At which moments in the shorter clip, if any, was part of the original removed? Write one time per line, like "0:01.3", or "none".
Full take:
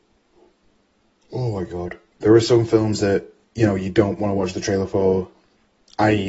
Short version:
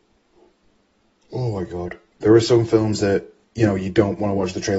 none